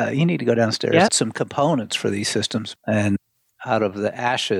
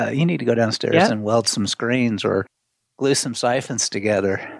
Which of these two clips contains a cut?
first; 2 cuts; at 1.1 s, 2.8 s

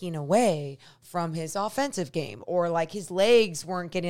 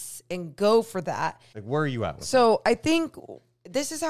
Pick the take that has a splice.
second; 1 cut; at 1.5 s

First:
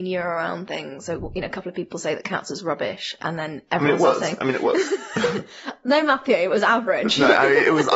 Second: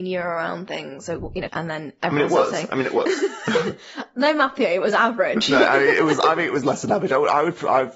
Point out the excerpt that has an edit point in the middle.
second; 1 cut; at 1.5 s

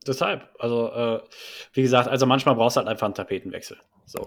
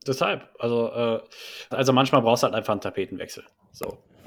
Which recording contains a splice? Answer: second; 1 cut; at 1.7 s

